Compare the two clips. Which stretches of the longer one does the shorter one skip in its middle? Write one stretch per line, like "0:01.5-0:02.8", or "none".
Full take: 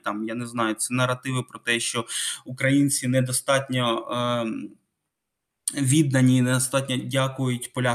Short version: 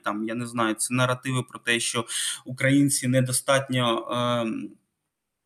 none